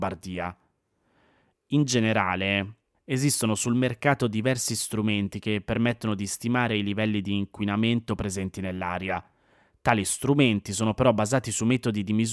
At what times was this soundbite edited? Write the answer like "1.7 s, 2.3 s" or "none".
2.9 s

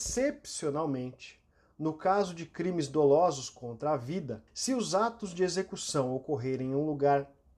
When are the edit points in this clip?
4.5 s

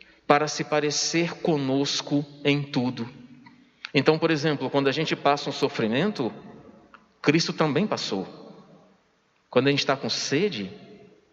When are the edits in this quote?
none

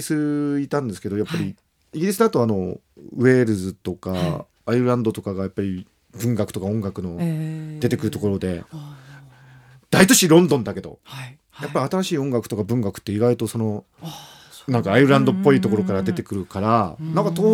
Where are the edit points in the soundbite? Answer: none

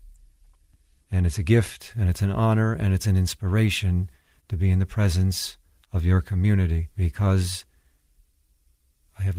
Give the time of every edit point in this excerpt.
1.0 s, 6.9 s

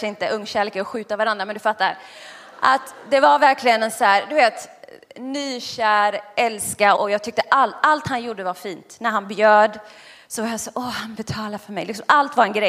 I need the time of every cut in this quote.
7.0 s

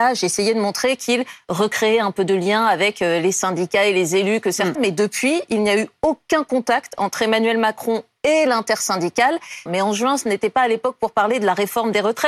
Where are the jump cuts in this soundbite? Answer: 4.7 s, 9.7 s

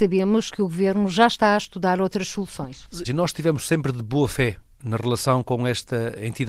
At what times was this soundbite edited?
3.0 s

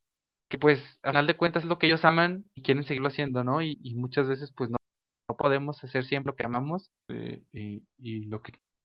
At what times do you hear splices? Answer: 7.1 s

